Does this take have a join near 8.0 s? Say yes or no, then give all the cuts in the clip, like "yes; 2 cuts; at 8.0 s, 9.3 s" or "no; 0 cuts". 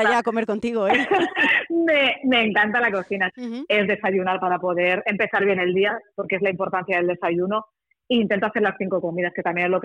no; 1 cut; at 3.3 s